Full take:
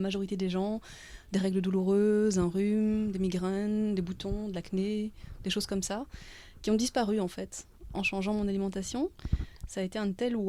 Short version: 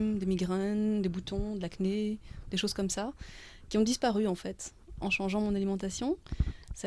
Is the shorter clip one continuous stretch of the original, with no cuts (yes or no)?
yes